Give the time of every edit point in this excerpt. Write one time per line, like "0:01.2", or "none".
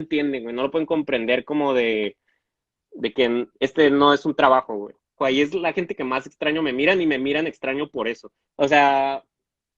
0:05.2
0:08.4